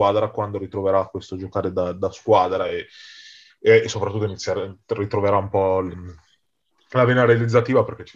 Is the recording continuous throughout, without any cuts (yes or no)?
yes